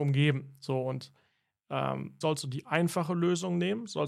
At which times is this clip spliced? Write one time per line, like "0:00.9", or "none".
0:02.2